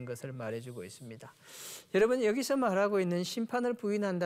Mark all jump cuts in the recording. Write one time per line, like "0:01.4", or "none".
none